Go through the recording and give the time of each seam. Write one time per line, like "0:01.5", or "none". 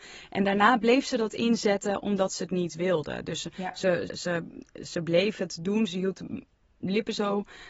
0:04.1